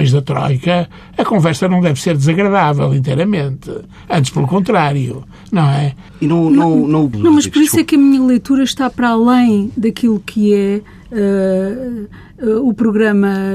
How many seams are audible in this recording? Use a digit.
2